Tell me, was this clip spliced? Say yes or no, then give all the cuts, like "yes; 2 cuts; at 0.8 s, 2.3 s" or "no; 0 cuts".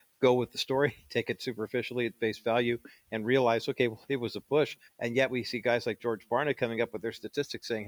yes; 1 cut; at 4.9 s